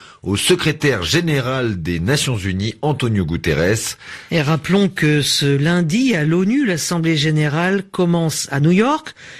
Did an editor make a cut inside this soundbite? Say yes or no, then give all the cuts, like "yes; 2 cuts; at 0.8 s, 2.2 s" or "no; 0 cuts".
yes; 1 cut; at 4.3 s